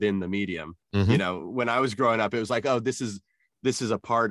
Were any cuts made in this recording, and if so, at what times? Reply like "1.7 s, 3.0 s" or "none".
none